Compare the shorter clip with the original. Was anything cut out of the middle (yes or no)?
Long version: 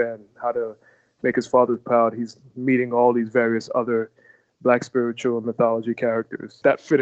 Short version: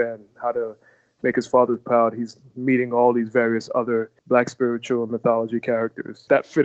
yes